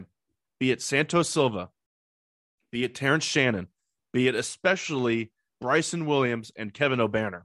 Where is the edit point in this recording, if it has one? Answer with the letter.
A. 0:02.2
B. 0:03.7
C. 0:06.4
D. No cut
D